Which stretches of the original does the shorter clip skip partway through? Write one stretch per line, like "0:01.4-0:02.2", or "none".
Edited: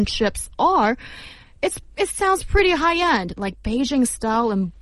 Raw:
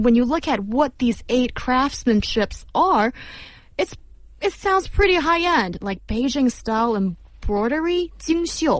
0:04.1-0:04.3

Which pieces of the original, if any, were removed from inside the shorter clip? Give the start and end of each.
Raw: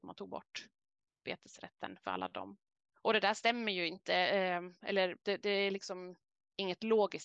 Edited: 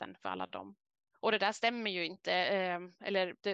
none

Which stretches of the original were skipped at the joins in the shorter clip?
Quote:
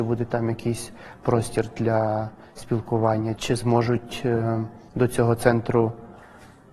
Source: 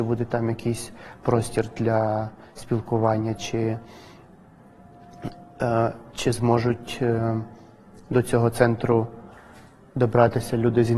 0:03.4-0:06.1
0:07.6-0:08.0

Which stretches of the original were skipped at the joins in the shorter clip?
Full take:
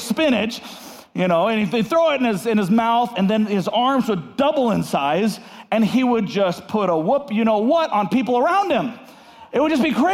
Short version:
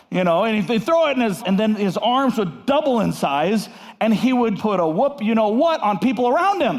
0:02.4-0:03.1
0:06.3-0:06.7

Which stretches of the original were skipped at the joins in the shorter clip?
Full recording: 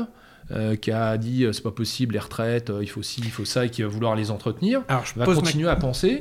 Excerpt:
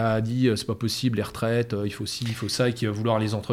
none

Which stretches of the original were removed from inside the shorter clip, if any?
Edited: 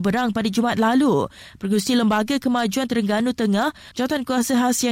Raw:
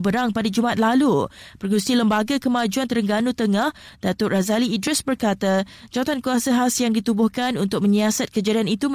0:03.9-0:05.9

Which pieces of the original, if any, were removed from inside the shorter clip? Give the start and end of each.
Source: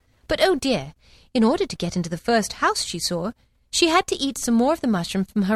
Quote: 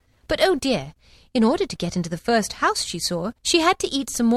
0:03.4-0:03.7

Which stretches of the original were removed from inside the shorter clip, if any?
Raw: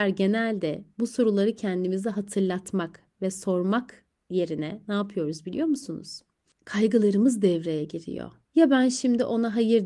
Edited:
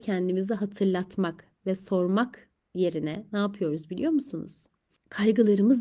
none

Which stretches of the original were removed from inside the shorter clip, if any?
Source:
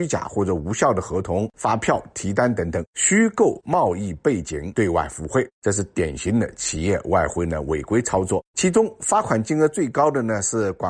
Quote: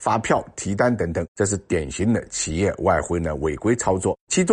0:02.9-0:05.5

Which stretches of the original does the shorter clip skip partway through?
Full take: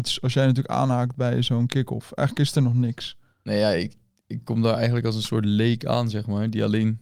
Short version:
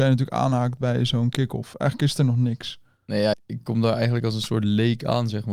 0:03.7-0:04.1

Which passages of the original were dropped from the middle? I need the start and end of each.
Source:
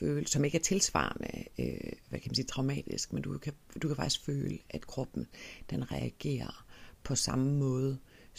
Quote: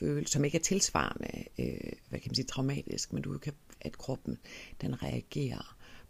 0:03.7-0:04.6

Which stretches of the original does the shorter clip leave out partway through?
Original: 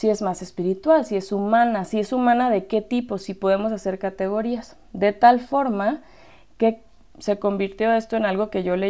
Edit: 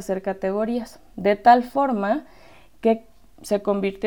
none

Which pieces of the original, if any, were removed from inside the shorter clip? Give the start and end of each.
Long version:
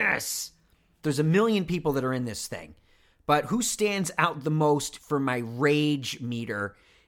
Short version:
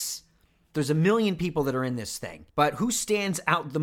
0:02.8-0:03.2

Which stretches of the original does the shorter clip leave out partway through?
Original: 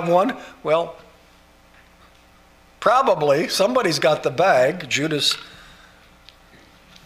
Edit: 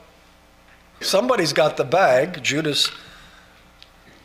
0:02.1-0:03.5

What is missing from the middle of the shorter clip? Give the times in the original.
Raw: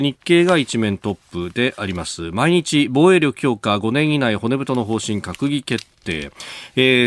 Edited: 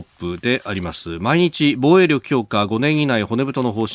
none

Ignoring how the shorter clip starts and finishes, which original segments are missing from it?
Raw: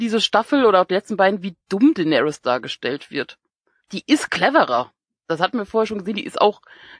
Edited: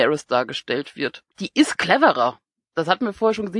0:03.5-0:03.8

